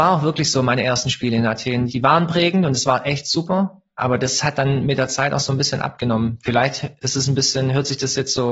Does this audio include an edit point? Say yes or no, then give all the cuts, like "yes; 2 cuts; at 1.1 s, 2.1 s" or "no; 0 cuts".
no; 0 cuts